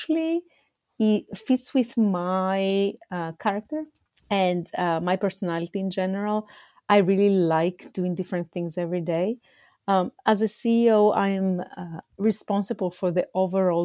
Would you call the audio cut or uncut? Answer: uncut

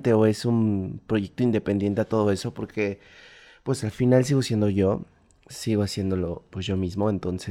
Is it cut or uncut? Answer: uncut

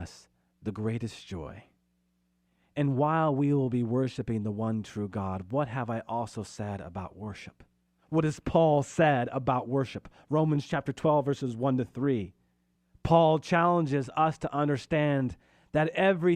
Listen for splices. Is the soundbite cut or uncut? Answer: uncut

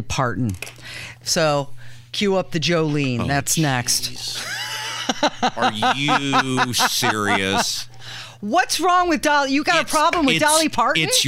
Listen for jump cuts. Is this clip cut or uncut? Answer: uncut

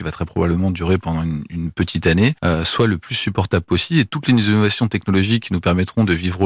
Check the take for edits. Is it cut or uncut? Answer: cut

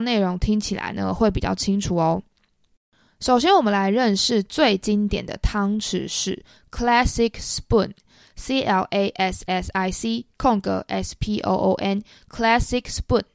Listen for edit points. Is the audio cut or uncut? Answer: uncut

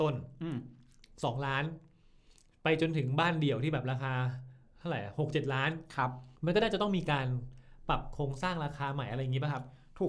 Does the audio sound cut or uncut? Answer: cut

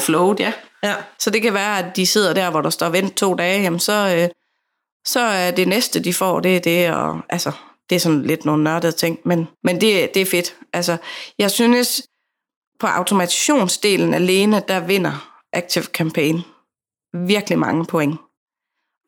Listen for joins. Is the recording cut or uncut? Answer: cut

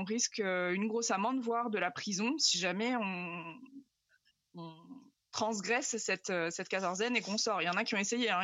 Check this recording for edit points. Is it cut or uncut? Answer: uncut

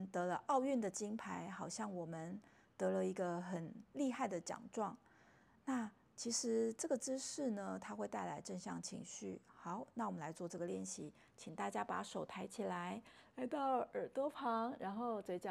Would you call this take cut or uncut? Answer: uncut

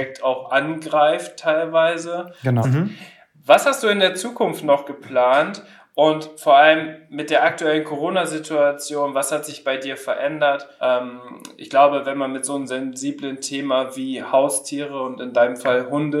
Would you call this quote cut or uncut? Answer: cut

